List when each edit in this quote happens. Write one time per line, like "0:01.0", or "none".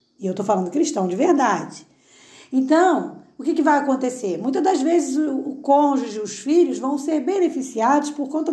none